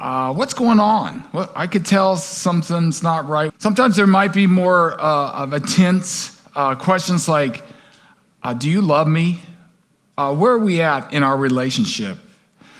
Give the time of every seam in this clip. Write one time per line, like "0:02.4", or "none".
0:03.5